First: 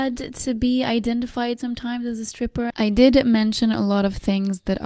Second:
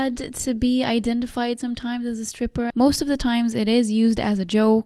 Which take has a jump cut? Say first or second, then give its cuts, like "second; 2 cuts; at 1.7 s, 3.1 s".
first; 1 cut; at 2.7 s